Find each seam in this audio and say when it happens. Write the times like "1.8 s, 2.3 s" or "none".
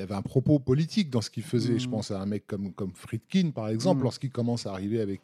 none

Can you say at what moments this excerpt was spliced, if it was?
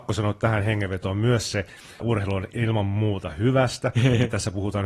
2.0 s

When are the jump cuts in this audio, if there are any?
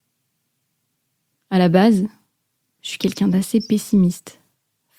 none

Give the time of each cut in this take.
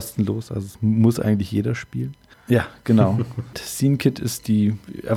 2.3 s, 3.5 s

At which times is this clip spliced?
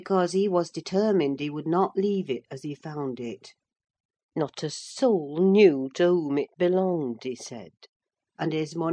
4.2 s

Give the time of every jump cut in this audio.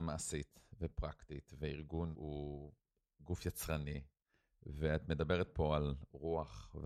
2.1 s

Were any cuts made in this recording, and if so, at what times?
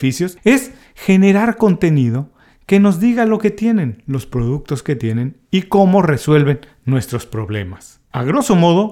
none

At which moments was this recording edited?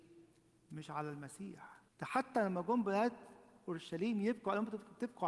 1.9 s

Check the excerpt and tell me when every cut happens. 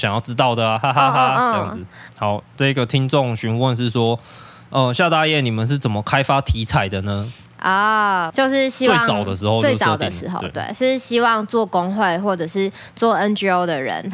2.1 s, 8.3 s

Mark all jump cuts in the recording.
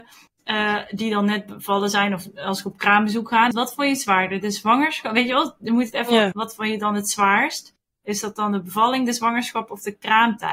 3.5 s, 6.3 s

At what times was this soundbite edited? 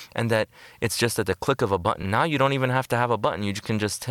none

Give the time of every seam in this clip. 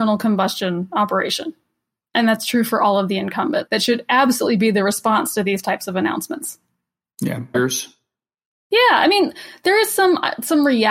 3.7 s, 7.5 s

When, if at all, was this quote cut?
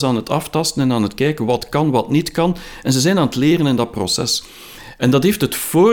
none

